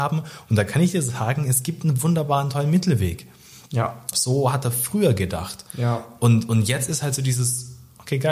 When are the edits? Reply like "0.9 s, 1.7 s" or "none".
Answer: 4.1 s